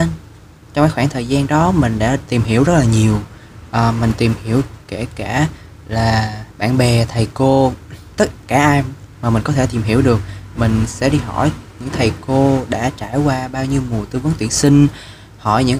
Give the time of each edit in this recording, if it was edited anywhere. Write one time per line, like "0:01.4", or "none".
none